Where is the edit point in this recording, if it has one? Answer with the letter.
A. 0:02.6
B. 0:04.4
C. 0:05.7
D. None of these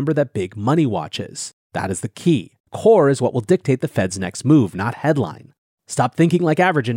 A